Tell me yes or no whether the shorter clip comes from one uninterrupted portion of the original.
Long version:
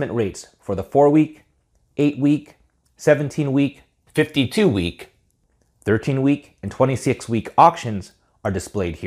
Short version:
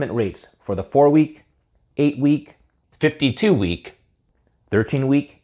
no